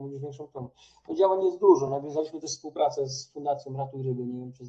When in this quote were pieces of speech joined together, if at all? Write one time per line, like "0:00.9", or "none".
none